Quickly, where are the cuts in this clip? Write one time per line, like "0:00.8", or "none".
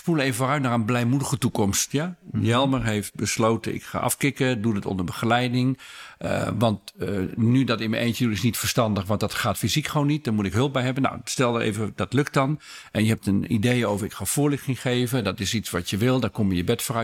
none